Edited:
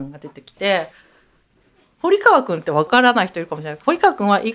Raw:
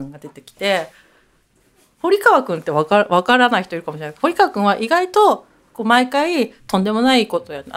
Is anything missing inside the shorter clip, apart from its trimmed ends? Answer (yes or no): yes